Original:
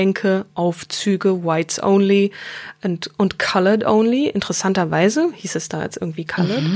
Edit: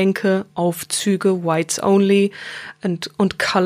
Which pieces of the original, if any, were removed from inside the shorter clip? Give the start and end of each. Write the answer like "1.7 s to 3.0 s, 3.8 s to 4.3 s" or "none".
none